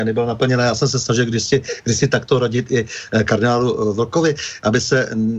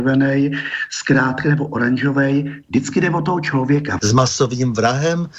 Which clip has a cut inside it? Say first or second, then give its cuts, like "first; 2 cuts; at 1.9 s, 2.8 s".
second; 1 cut; at 4.0 s